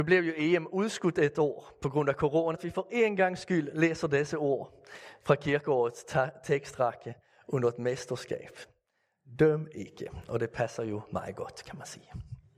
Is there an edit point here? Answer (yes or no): yes